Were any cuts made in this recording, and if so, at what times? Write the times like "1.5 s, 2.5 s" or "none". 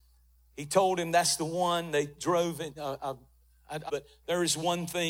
2.8 s, 3.9 s

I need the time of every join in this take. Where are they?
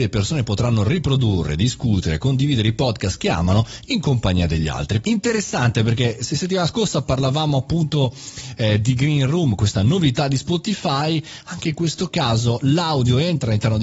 5.0 s

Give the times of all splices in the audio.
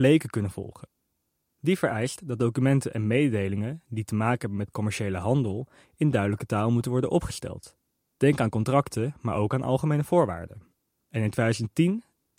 1.4 s

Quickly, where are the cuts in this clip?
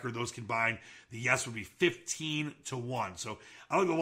none

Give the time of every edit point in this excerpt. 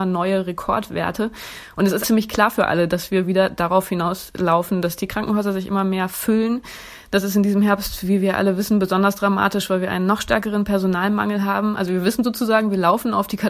2.0 s

